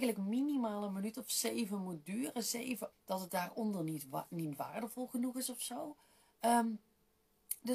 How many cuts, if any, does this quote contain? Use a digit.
1